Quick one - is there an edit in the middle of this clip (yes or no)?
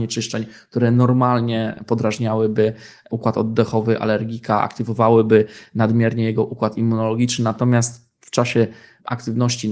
no